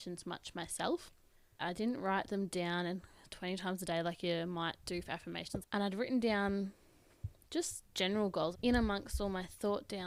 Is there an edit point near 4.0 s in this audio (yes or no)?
no